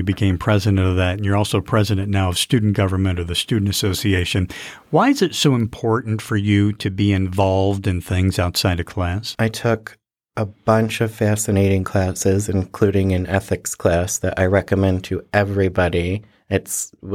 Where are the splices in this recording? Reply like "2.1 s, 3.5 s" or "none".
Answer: 9.3 s